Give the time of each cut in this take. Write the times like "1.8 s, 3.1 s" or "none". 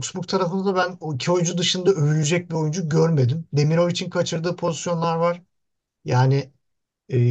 none